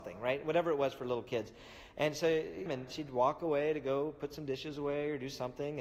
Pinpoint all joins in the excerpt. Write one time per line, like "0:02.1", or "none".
0:02.7